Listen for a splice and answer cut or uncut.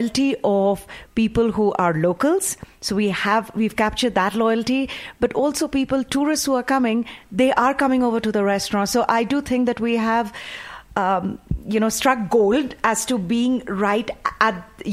uncut